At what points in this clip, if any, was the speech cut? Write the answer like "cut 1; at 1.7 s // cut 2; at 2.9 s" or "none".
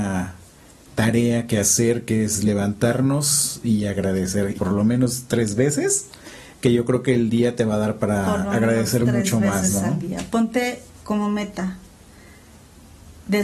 cut 1; at 4.6 s